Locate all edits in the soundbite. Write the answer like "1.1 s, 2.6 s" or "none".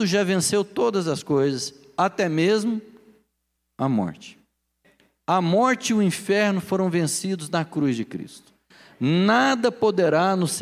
none